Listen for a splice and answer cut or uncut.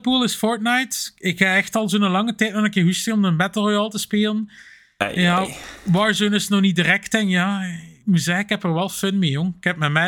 uncut